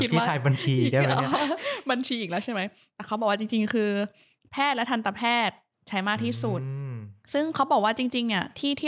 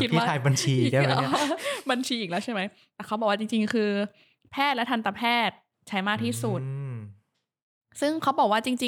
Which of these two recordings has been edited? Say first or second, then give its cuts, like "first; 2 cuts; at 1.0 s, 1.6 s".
first; 1 cut; at 7.2 s